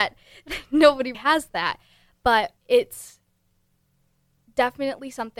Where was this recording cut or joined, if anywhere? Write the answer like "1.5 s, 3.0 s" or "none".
1.1 s, 2.6 s